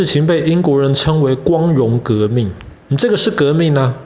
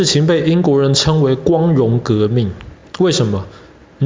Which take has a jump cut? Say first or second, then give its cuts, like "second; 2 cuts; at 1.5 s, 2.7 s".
first; 1 cut; at 2.8 s